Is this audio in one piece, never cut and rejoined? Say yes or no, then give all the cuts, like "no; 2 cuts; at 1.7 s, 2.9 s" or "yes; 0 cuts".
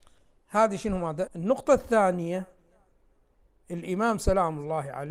no; 1 cut; at 1.3 s